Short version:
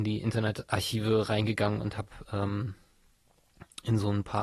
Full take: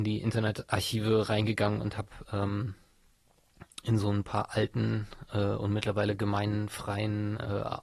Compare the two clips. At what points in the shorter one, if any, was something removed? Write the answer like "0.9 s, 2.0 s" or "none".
none

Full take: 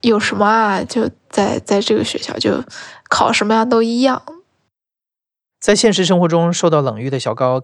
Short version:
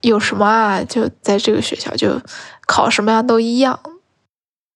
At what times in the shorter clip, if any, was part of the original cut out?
1.2 s

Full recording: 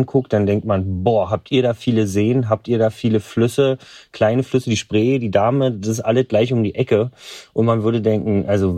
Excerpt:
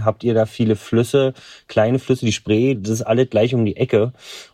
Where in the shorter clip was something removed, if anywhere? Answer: 2.7 s

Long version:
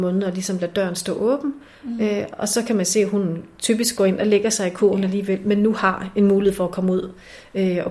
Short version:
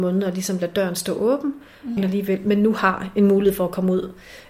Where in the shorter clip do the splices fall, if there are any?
2.0 s

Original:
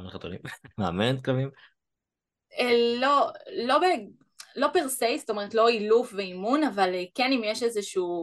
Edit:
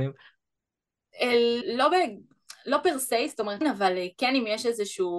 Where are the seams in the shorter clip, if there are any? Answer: 1.6 s, 3.6 s

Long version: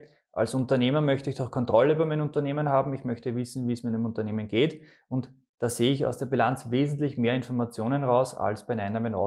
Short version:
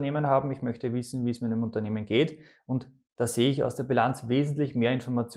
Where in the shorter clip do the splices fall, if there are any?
none

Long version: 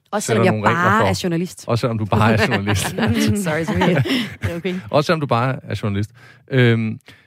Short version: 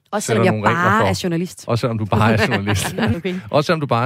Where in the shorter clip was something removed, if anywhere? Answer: 3.1 s

